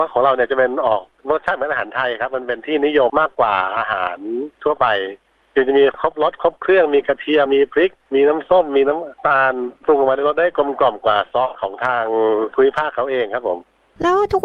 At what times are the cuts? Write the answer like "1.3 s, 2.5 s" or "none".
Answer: 3.1 s, 7.5 s